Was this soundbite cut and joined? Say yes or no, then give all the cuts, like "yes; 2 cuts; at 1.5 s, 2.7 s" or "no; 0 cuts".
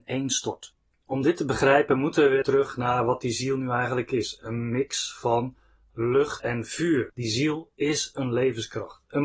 yes; 2 cuts; at 2.4 s, 7.1 s